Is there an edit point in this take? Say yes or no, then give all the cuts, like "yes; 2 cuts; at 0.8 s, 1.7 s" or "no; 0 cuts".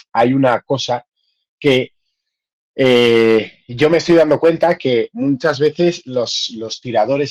no; 0 cuts